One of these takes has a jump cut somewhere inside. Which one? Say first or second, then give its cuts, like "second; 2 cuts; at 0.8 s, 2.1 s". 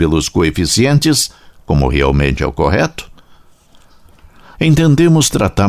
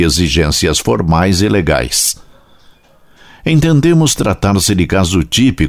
first; 1 cut; at 4.5 s